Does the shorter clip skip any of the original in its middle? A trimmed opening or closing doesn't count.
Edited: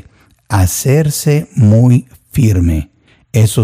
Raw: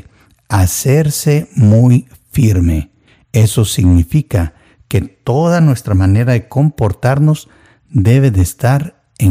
no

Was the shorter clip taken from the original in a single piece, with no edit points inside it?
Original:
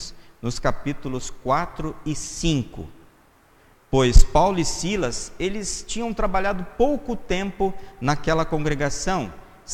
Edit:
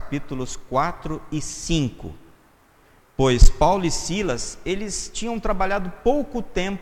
yes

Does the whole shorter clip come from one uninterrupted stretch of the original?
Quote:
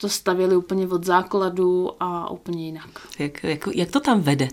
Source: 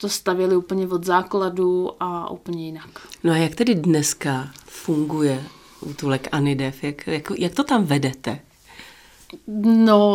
no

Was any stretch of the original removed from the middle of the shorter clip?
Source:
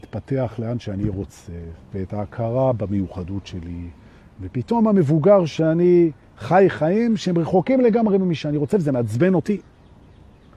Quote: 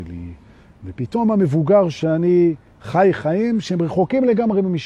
no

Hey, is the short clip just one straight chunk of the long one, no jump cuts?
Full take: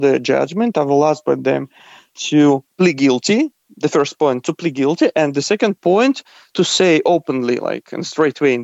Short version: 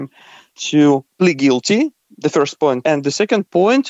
no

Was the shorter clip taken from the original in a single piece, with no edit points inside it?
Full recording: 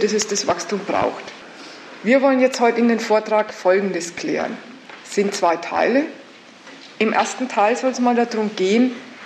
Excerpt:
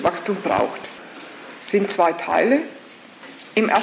no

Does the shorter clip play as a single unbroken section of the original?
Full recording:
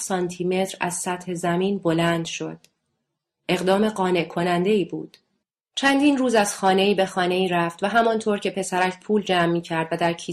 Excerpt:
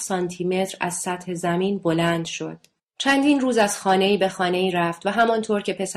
no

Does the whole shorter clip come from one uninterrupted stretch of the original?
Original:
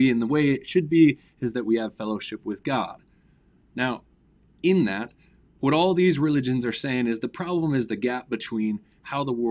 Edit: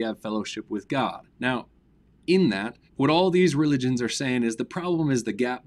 no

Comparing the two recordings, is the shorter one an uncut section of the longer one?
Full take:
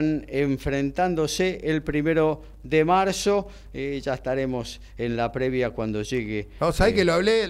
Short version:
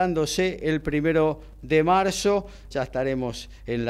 no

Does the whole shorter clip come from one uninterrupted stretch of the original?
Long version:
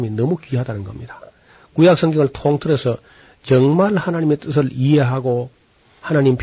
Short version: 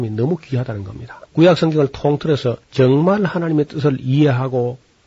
no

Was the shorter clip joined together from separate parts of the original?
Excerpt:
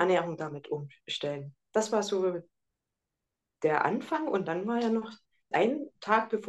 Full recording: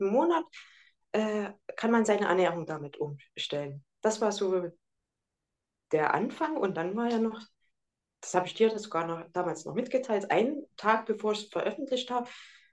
yes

